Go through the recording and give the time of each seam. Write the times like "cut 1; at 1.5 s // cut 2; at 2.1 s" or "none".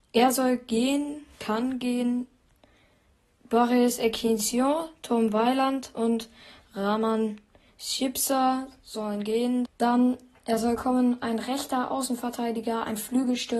cut 1; at 9.6 s